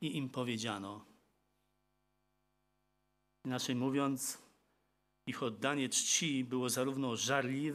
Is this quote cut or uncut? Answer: uncut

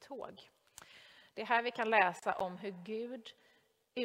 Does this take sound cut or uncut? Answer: cut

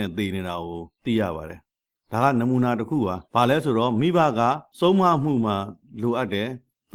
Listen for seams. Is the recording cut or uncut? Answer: cut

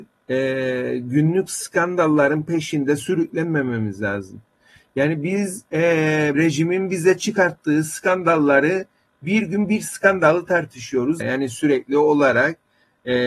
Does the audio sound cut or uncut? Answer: cut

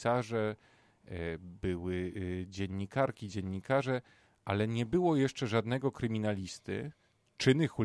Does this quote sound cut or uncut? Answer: uncut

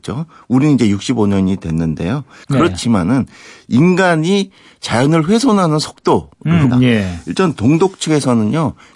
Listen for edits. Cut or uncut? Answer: cut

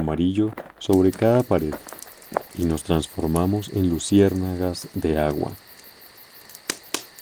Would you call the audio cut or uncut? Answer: uncut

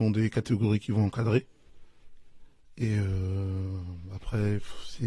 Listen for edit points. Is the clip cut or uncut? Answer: uncut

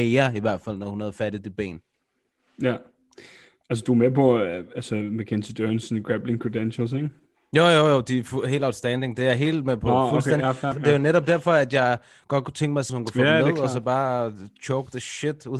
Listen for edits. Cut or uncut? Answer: cut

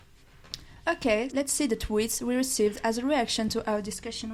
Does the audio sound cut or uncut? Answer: cut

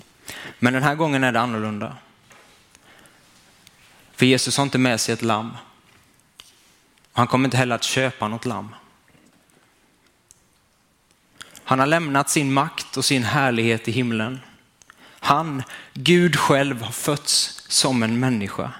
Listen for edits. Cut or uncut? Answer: uncut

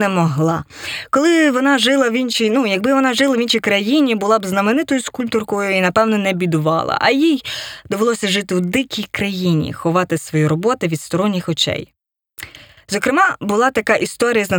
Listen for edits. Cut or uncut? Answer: uncut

